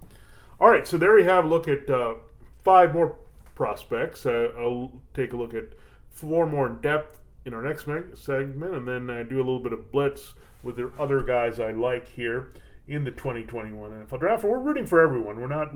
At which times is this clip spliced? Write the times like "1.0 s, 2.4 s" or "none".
none